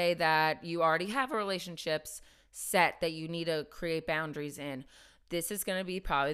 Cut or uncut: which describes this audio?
uncut